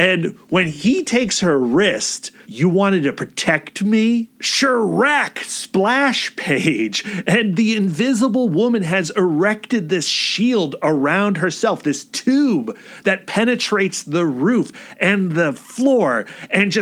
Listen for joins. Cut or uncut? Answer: cut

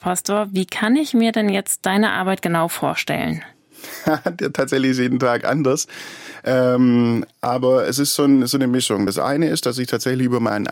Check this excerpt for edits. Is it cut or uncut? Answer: uncut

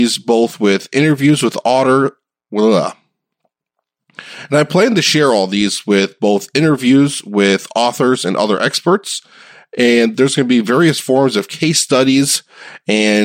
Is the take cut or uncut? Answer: uncut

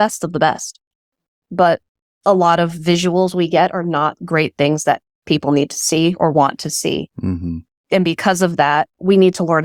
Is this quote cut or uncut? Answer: uncut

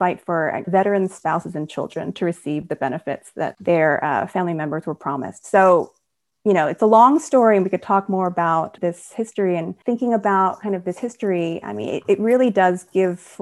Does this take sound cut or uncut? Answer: uncut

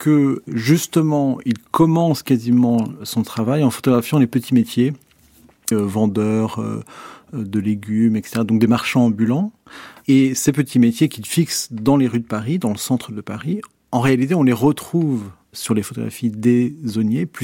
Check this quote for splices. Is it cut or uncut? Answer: cut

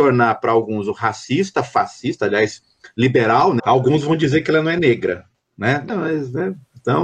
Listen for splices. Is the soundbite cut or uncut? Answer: cut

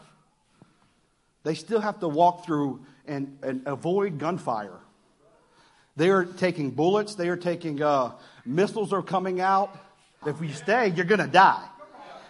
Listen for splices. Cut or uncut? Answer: cut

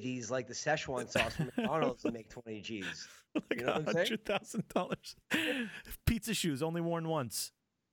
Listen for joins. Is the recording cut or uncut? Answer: uncut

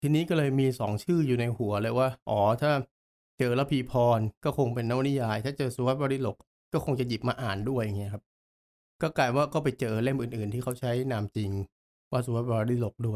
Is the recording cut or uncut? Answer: uncut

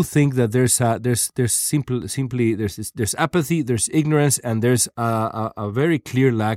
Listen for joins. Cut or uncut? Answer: uncut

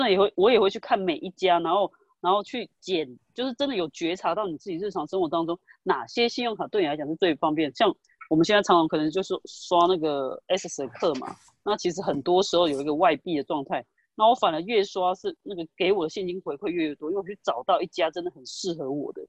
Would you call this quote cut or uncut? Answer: uncut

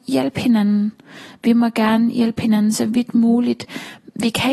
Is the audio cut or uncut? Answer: uncut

